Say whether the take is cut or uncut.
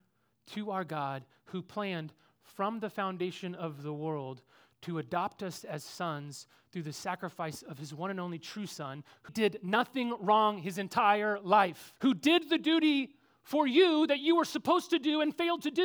cut